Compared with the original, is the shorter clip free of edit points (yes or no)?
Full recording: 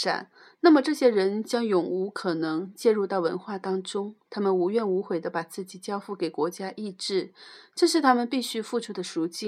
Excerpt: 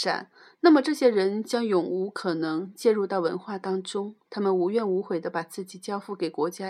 yes